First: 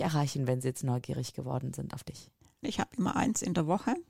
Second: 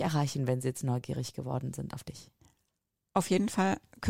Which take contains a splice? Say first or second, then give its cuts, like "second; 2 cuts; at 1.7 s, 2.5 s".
first; 1 cut; at 2.6 s